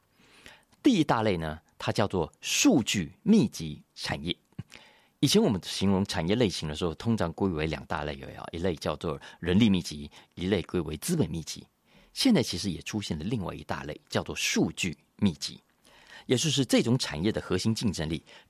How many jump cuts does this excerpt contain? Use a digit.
0